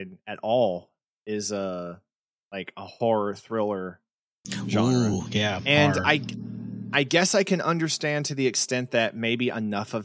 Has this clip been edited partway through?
no; 0 cuts

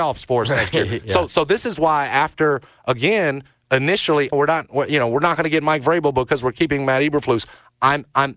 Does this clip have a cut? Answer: yes; 1 cut; at 4.3 s

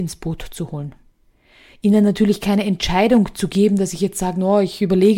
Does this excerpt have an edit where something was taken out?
no; 0 cuts

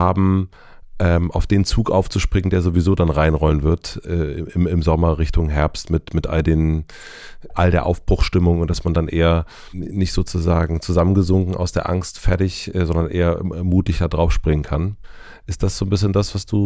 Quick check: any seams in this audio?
no; 0 cuts

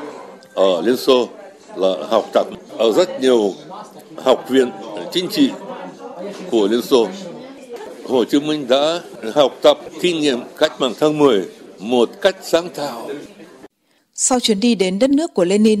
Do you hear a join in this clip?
no; 0 cuts

